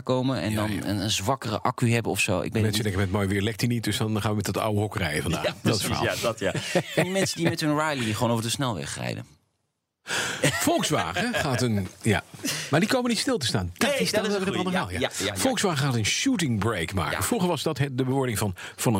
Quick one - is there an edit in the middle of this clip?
no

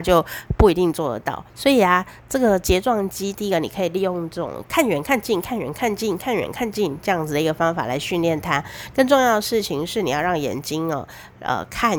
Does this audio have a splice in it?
yes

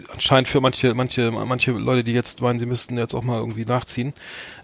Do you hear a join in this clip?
no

